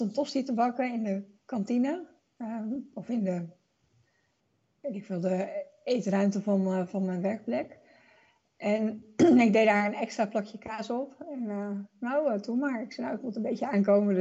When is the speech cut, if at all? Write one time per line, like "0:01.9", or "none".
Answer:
none